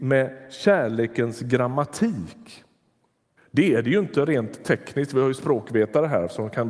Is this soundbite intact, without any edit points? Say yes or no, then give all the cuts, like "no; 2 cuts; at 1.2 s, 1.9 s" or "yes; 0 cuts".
no; 1 cut; at 3.4 s